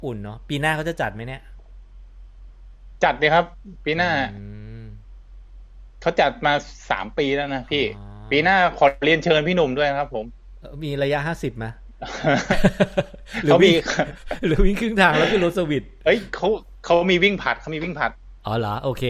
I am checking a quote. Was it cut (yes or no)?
no